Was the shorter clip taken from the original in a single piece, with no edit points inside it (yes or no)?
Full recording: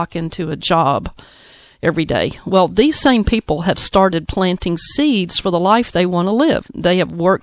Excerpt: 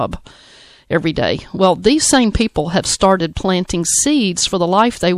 yes